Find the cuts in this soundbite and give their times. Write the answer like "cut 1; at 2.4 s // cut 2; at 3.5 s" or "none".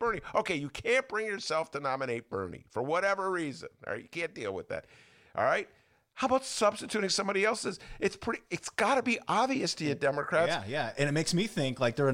none